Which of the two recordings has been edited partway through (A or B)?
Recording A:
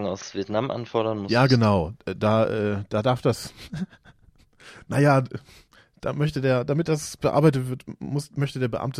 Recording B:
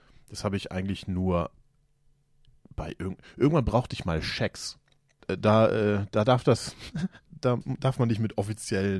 B